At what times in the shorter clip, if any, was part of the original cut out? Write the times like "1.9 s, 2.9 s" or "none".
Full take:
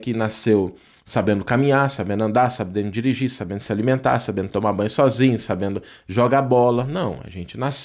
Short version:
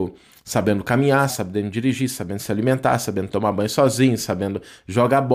1.3 s